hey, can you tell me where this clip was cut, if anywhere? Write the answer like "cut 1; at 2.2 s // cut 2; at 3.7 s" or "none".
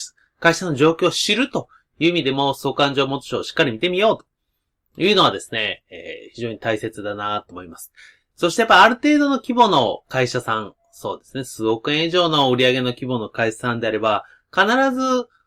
cut 1; at 8.3 s